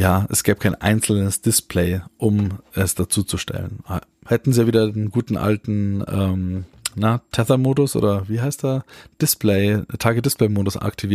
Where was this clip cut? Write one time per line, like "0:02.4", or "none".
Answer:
none